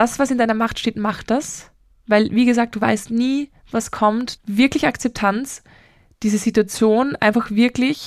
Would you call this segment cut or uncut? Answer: cut